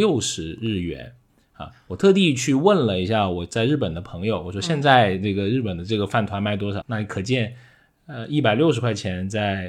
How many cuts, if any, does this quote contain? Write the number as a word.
one